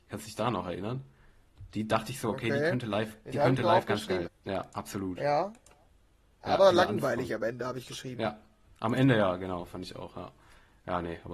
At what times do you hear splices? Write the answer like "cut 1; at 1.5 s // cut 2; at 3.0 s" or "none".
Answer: cut 1; at 4.3 s